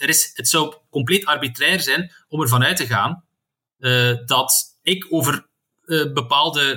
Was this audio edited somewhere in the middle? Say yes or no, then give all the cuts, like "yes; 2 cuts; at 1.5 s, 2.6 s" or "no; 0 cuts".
no; 0 cuts